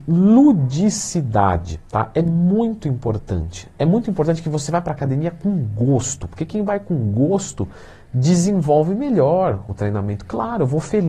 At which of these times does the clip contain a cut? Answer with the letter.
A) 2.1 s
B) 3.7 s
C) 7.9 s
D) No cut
D